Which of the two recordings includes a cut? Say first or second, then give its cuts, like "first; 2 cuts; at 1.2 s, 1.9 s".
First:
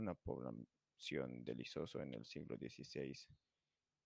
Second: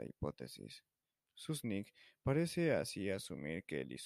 second; 1 cut; at 1.3 s